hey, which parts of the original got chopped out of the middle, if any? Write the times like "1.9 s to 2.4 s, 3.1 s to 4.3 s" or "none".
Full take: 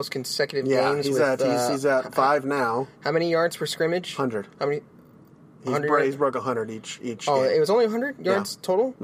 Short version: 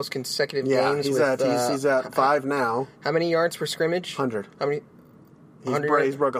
none